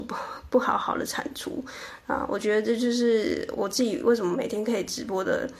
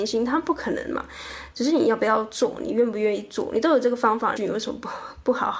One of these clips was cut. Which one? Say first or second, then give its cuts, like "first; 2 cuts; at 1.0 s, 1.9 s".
second; 2 cuts; at 1.5 s, 4.4 s